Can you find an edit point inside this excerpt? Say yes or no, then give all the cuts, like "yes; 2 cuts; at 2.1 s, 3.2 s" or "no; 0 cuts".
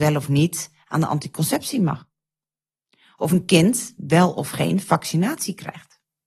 no; 0 cuts